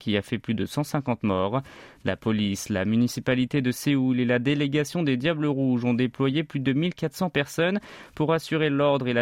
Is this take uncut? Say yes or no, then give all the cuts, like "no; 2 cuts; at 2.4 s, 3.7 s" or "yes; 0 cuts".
yes; 0 cuts